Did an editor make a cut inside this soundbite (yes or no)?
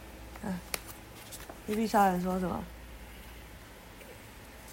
no